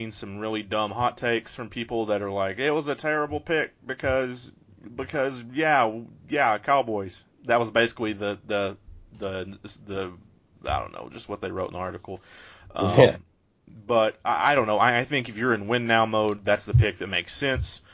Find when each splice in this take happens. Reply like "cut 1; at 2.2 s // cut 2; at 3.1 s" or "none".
none